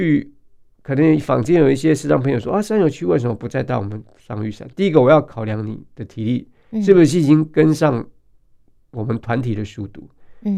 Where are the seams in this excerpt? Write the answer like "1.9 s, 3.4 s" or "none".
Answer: none